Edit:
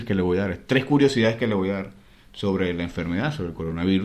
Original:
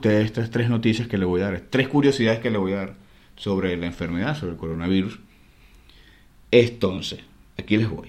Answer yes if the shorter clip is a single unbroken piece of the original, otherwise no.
yes